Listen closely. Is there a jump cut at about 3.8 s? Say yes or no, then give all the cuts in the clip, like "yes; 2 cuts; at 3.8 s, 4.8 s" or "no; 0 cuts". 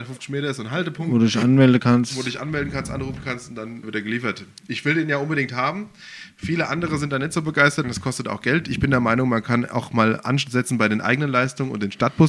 yes; 2 cuts; at 3.8 s, 7.8 s